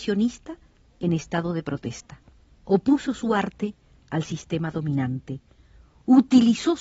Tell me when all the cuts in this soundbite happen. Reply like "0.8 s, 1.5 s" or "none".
2.5 s